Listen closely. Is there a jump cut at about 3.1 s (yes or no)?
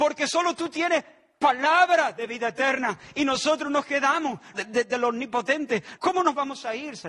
no